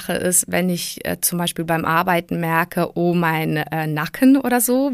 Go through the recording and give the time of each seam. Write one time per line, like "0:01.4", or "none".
none